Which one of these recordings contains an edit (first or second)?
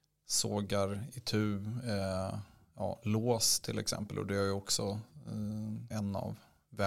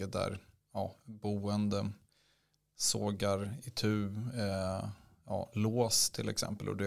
first